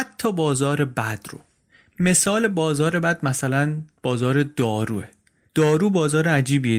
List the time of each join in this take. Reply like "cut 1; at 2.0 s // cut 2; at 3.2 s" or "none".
none